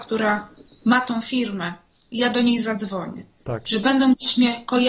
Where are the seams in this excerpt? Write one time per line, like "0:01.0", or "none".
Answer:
none